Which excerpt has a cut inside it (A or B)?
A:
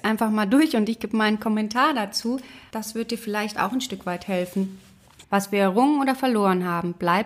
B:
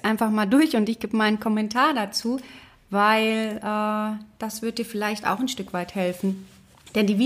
A